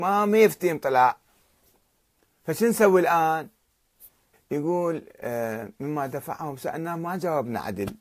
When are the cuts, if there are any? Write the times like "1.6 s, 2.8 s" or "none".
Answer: 4.3 s